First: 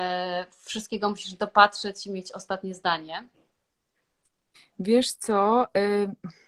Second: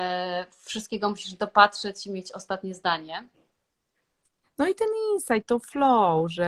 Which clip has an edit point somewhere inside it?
second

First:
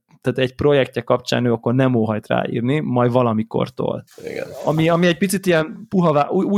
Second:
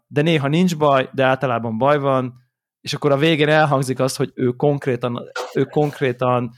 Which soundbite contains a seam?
first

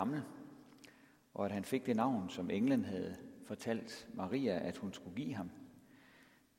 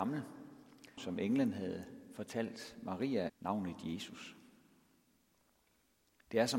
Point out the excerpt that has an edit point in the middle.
second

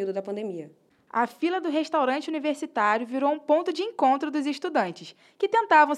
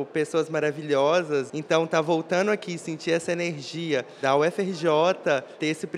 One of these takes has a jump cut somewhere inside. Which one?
second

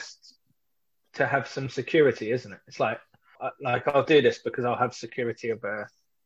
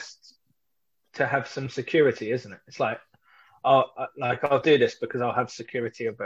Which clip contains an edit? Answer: first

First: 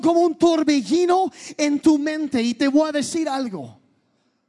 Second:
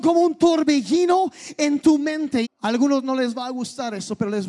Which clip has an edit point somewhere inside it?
second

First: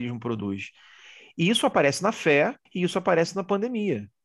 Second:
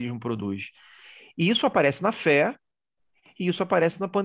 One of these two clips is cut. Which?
first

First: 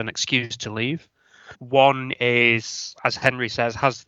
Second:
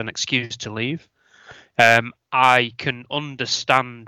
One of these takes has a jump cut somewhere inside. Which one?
first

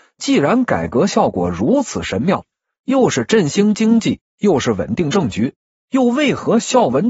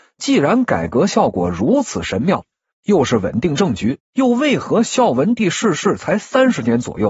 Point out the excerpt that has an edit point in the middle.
second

